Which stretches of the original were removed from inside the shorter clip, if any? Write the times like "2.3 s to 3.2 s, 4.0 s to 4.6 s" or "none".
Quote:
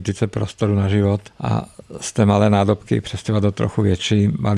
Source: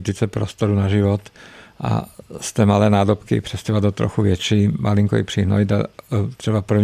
1.3 s to 1.7 s